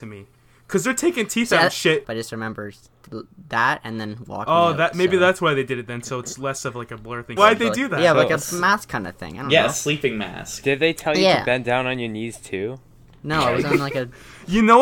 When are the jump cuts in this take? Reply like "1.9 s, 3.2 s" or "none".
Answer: 2.0 s, 7.4 s